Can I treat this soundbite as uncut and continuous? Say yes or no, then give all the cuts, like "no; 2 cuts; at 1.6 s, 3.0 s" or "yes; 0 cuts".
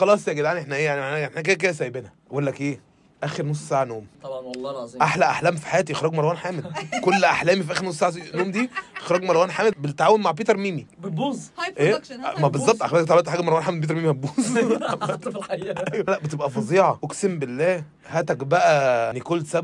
no; 1 cut; at 16.1 s